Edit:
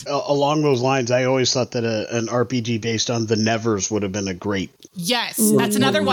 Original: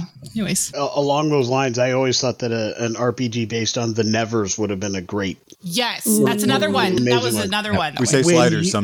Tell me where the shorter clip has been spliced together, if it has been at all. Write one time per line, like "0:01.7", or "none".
none